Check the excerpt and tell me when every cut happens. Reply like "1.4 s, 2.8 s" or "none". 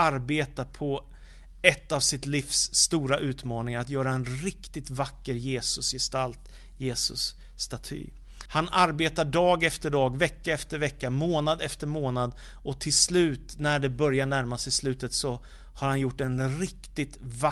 8.5 s